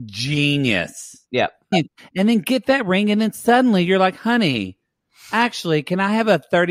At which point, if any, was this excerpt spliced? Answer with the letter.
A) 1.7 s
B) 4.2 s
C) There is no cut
A